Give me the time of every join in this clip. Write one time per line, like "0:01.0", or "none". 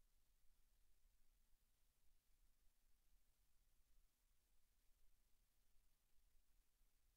none